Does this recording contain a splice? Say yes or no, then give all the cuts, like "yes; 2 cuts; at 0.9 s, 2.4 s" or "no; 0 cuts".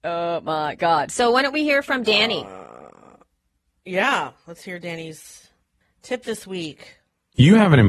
no; 0 cuts